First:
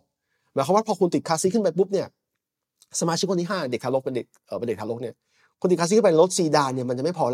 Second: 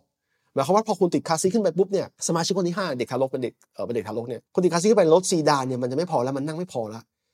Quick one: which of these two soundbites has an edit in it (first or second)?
second